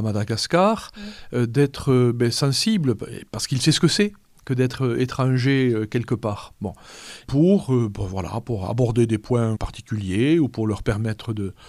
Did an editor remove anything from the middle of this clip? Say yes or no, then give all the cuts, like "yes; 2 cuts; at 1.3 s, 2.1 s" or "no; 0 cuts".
yes; 2 cuts; at 7.2 s, 9.5 s